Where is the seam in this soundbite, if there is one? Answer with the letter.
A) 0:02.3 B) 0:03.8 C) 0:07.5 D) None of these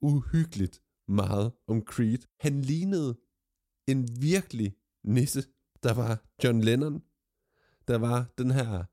A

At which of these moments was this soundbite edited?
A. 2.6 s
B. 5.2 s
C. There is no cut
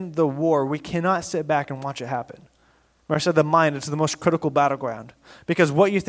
C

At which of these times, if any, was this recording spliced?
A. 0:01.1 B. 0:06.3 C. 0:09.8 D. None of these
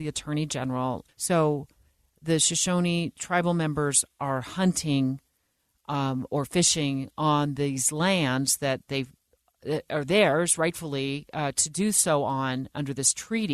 A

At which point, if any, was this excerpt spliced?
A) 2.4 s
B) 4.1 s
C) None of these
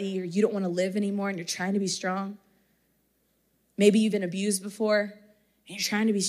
B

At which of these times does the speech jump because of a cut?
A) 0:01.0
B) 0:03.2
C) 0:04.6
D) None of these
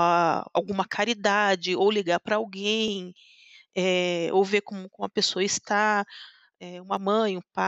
D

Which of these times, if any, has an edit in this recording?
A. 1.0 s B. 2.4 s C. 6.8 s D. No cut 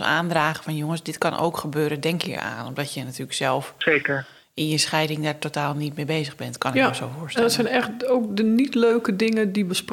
B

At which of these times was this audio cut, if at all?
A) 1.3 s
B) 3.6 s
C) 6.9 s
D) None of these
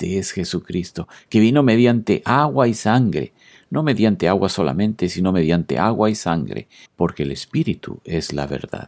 C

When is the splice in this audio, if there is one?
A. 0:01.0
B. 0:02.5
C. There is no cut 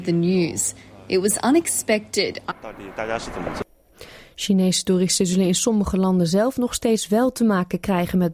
B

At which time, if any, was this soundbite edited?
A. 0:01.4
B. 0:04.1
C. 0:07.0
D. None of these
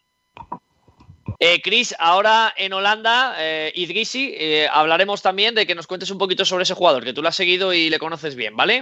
A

